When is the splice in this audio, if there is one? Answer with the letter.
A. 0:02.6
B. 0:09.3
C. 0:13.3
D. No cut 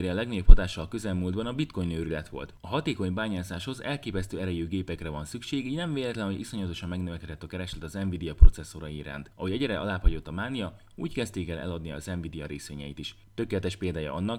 D